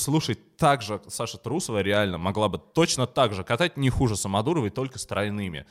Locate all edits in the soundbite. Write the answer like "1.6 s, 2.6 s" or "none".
none